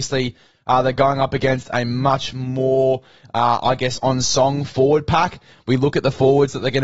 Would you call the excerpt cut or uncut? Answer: uncut